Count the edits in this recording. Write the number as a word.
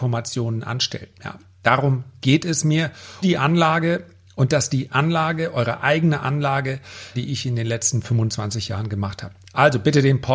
two